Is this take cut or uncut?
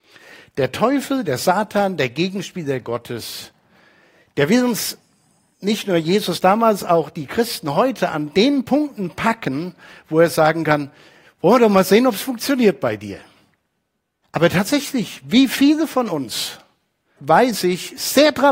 cut